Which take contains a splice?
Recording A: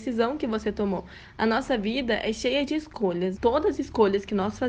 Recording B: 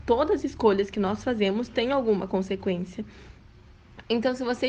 A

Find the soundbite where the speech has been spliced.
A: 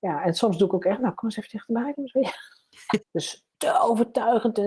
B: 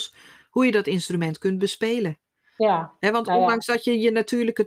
A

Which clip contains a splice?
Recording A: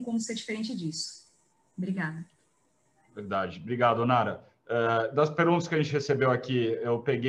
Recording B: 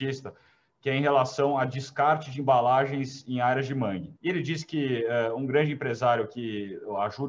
B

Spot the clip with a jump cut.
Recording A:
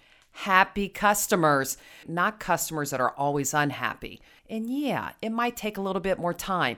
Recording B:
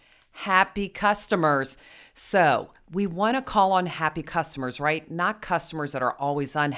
A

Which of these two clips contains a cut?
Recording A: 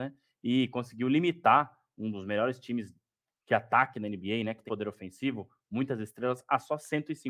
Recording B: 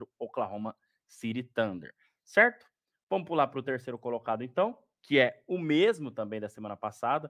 A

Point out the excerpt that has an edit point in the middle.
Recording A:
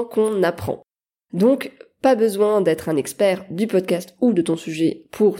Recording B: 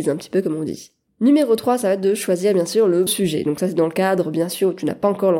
B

